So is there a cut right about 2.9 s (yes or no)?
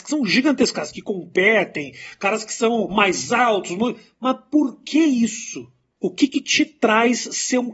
yes